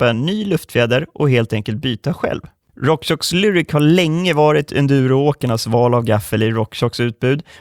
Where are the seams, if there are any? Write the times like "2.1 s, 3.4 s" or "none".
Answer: 2.6 s